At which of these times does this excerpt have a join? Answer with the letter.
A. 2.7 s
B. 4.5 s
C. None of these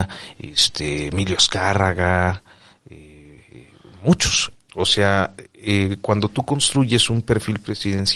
B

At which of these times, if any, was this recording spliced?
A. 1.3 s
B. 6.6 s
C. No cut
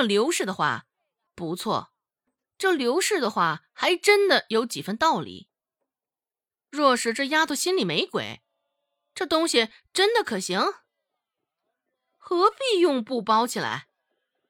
A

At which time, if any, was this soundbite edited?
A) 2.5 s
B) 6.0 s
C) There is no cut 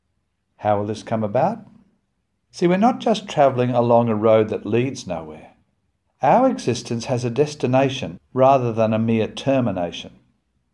A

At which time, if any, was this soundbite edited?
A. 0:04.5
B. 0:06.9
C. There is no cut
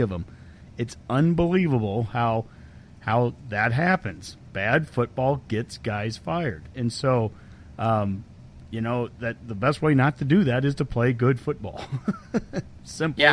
C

